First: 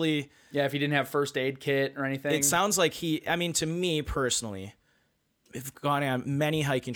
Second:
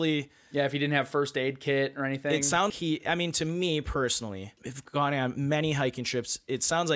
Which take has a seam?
second; 2 cuts; at 2.7 s, 4.6 s

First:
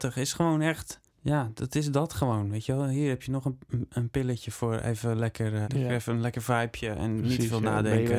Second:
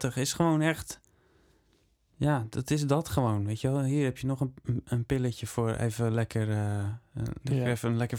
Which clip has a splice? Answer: first; 2 cuts; at 1.1 s, 5.6 s

